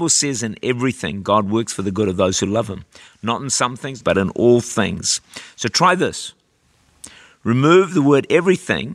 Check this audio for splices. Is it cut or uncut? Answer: cut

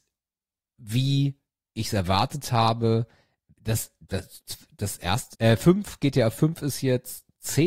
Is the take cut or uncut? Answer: cut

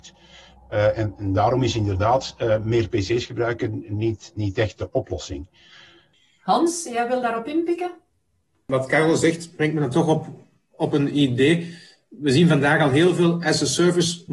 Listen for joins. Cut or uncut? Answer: uncut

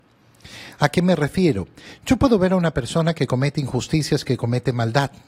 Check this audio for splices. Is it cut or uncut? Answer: uncut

